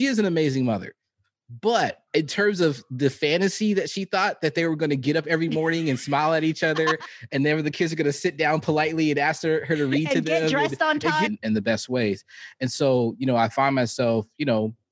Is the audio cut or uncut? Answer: cut